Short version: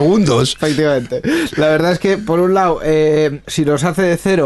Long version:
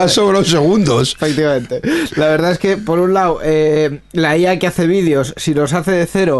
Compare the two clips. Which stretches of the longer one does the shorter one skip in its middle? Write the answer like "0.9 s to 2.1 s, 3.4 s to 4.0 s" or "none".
4.0 s to 5.3 s